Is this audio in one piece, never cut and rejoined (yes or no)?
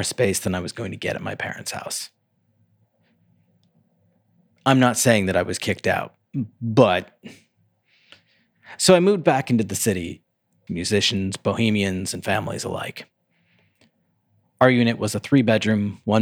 no